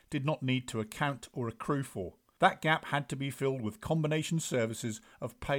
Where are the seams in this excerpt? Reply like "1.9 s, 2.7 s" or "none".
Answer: 2.4 s